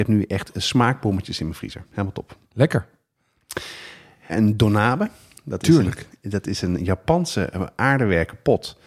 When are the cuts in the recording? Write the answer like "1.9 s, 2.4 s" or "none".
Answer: 4.3 s

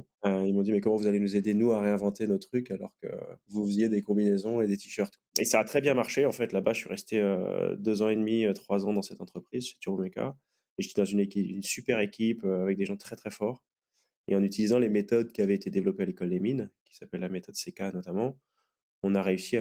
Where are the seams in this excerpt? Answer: none

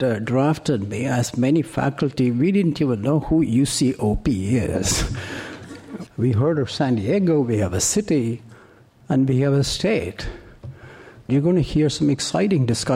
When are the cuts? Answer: 6.1 s, 11.3 s

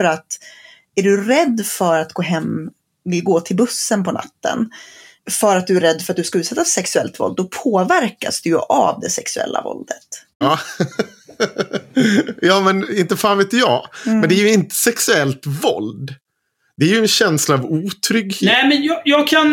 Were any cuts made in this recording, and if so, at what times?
5.2 s, 10.4 s

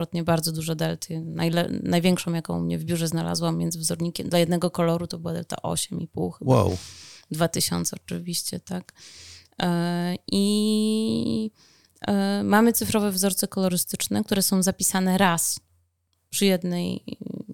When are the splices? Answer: none

